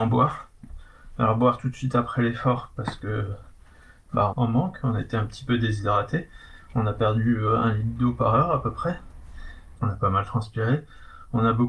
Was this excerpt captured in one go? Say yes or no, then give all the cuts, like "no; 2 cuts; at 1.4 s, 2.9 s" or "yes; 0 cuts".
no; 2 cuts; at 4.3 s, 9.7 s